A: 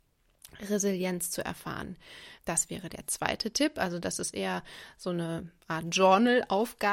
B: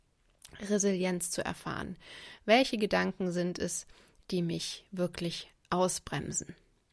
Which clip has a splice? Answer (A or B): A